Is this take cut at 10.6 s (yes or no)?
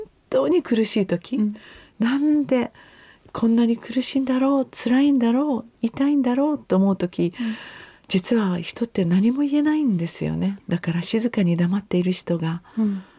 yes